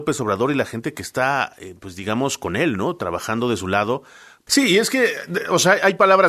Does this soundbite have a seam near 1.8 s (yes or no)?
no